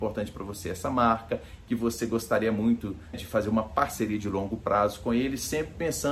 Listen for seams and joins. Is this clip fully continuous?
no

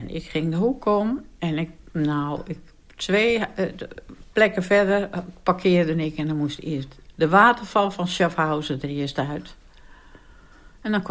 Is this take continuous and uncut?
no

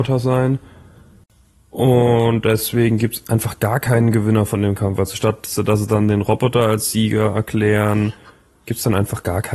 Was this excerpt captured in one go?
yes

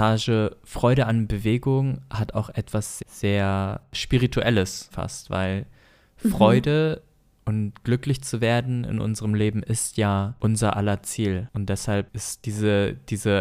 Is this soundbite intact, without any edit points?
no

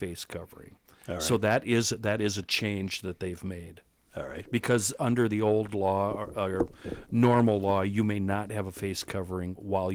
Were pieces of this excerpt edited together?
no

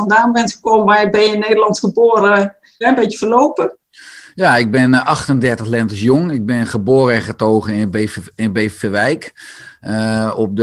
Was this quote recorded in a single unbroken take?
no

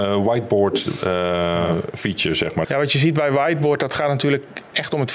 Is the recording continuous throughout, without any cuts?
no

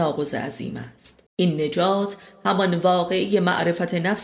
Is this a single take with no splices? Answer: no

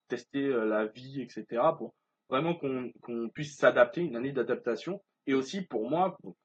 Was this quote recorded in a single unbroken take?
no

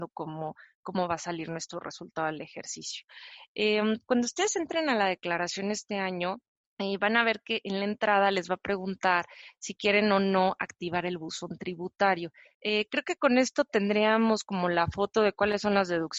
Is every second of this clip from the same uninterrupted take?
no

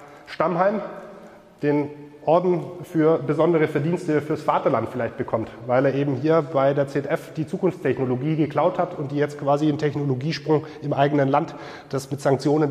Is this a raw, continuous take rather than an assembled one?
yes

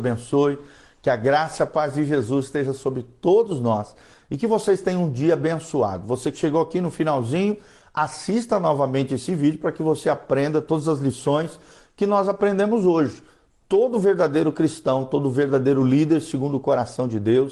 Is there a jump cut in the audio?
no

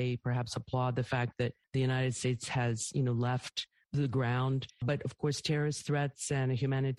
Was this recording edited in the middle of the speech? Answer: no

